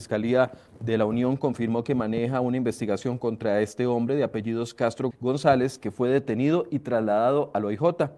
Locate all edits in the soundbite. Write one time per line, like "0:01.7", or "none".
0:05.1

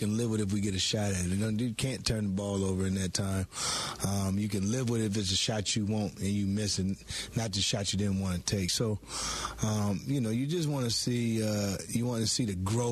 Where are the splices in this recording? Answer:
none

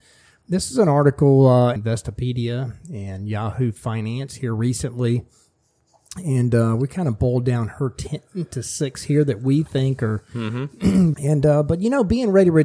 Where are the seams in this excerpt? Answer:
0:01.8
0:11.1

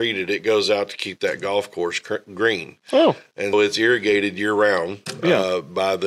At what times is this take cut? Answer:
0:03.5

